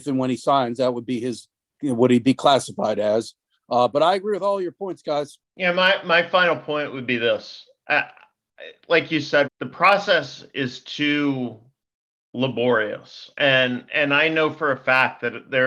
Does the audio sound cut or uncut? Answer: cut